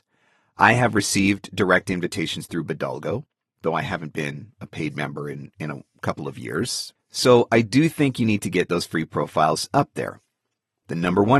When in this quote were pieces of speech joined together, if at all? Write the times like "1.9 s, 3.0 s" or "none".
7.0 s